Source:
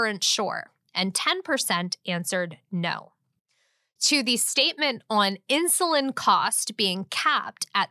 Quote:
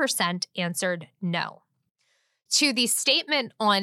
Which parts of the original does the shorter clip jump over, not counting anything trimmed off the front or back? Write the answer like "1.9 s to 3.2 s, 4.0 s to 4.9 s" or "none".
none

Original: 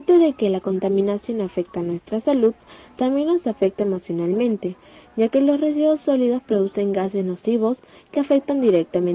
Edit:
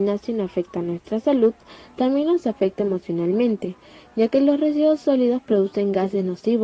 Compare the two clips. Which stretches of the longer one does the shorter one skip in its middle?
none

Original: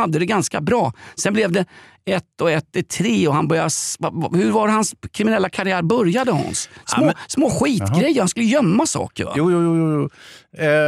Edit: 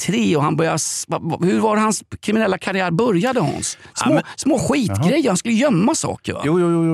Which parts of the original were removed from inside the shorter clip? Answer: none

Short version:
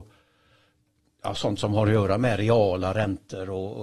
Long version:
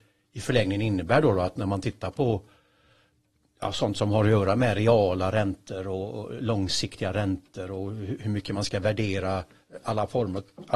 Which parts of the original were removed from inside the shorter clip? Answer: none

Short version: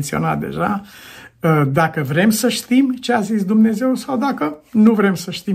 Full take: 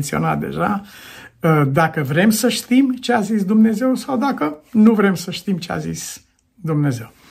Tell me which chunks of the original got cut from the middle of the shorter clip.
none

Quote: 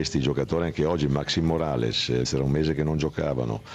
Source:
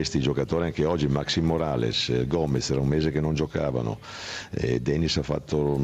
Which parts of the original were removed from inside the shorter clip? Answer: 2.2 s to 2.6 s

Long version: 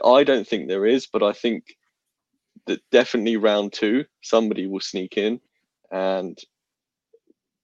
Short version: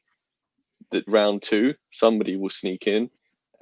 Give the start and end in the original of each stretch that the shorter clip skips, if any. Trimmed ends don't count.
2.8 s to 3.4 s

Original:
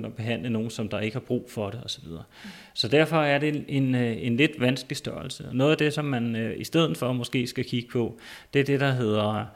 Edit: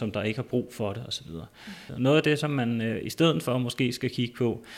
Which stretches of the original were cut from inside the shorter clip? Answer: 2.7 s to 5.4 s

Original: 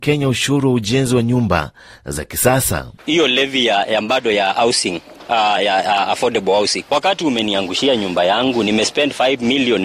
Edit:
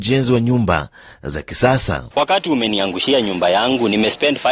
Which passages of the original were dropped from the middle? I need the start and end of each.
2.9 s to 6.9 s

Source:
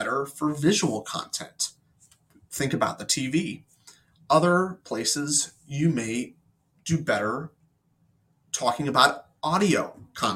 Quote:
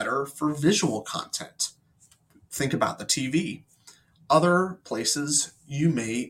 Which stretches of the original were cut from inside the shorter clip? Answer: none

